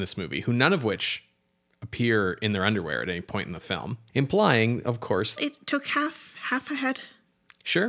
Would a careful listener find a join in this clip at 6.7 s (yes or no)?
no